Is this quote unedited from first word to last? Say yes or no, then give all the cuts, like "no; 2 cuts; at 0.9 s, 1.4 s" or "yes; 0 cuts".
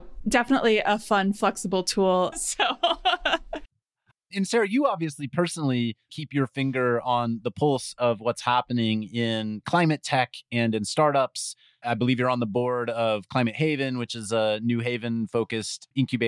no; 2 cuts; at 2.3 s, 6.1 s